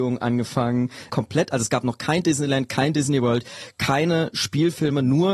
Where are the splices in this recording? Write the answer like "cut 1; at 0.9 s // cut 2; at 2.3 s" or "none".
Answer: cut 1; at 1.1 s